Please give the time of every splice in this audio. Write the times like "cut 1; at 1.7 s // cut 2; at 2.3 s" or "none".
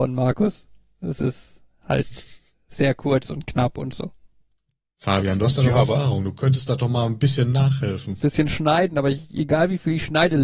none